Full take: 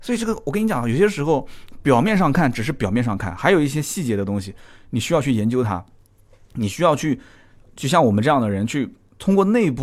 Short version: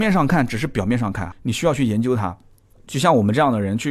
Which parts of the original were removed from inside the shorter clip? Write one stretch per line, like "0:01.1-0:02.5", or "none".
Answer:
0:03.4-0:04.8
0:06.2-0:07.6

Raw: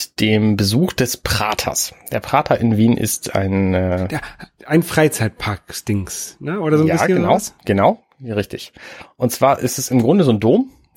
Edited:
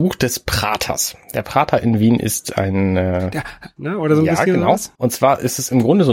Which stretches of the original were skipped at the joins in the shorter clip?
0:04.5-0:06.4
0:07.6-0:09.1

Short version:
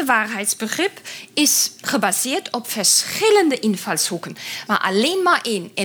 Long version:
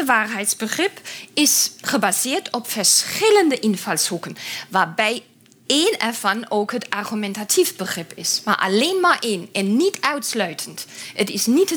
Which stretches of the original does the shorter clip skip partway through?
0:04.7-0:08.4

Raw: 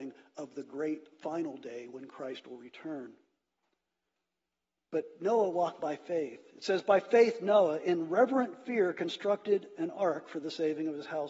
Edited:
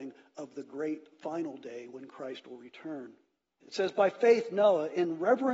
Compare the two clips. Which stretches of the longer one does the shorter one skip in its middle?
0:03.6-0:06.5

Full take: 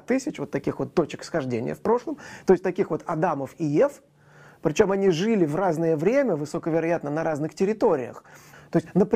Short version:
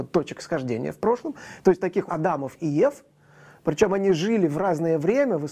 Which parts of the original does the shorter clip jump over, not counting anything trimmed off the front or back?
0:02.9-0:03.0

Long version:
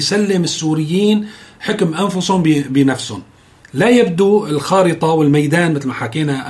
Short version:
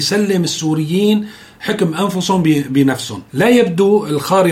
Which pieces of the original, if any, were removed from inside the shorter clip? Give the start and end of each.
0:03.3-0:03.7

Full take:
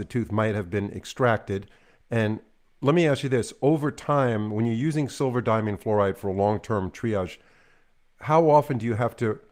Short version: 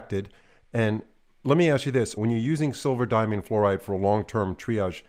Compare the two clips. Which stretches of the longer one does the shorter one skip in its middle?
0:03.5-0:04.5

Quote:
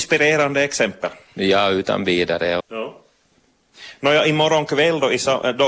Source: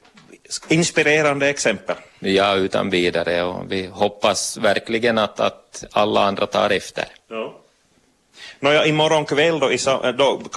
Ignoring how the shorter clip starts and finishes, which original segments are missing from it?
0:03.5-0:07.2

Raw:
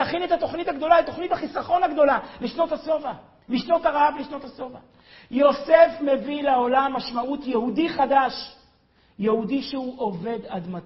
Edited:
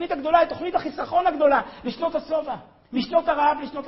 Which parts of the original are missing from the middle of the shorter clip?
none

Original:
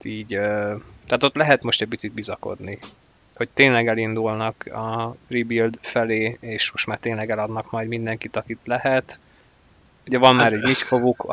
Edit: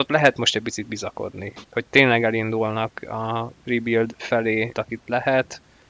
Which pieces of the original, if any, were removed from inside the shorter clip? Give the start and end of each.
0:02.9-0:03.3
0:06.4-0:08.3

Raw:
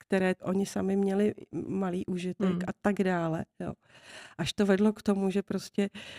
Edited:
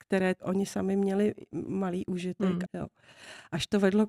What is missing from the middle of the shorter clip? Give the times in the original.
0:02.7-0:03.5

